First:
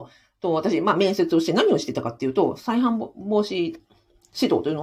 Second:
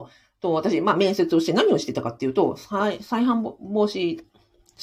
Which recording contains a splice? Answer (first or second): first